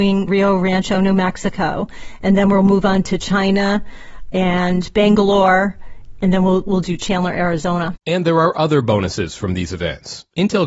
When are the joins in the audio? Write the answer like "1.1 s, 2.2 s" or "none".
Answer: none